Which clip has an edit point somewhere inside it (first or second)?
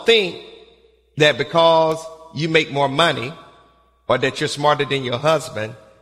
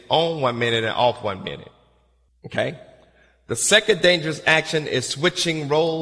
second